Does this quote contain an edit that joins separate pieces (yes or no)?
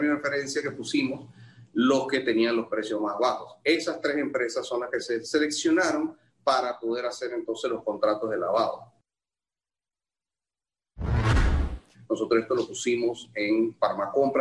yes